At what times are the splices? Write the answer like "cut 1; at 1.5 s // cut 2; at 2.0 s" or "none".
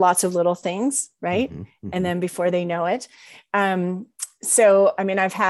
none

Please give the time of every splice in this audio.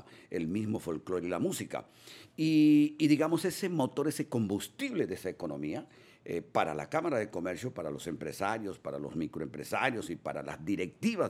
none

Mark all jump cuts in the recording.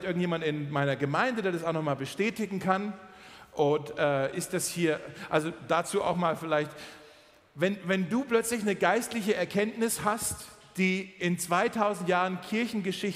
none

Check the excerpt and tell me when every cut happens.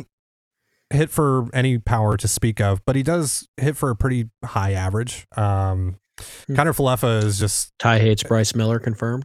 cut 1; at 5.3 s

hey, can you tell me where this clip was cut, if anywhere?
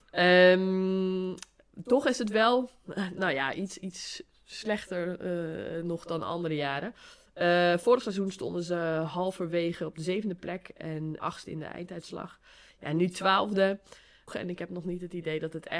cut 1; at 11.2 s // cut 2; at 14.3 s

